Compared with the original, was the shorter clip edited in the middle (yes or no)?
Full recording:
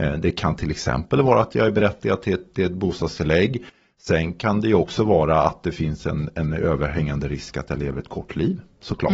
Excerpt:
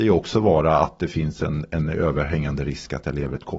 no